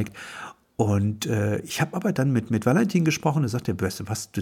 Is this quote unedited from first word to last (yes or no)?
yes